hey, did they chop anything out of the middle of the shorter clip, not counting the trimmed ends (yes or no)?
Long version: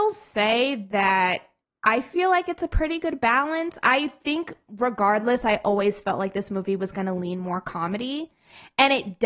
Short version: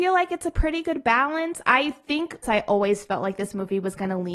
yes